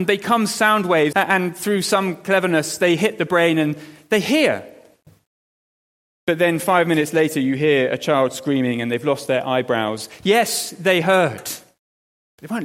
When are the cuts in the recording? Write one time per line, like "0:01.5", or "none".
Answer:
0:01.1